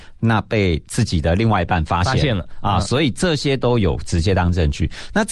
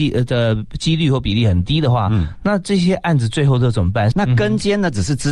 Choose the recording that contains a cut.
second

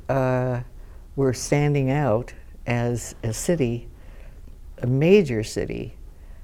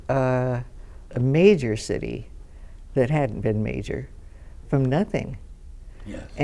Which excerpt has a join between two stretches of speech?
second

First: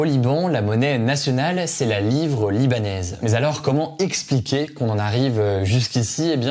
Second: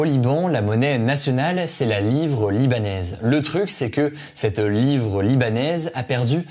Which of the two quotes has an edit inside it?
first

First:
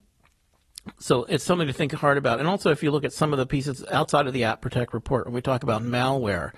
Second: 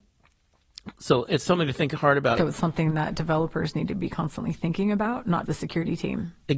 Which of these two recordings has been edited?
second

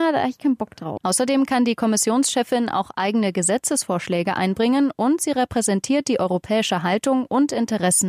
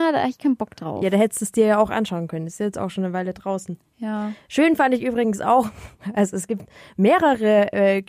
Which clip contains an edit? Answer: first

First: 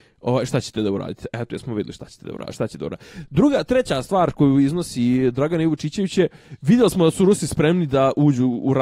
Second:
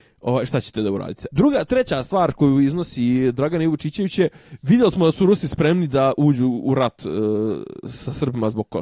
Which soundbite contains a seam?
second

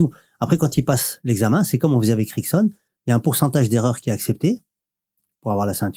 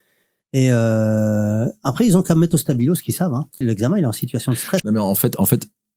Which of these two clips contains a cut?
second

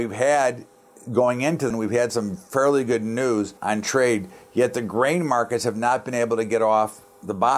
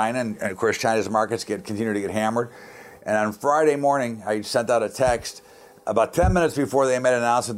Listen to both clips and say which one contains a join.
first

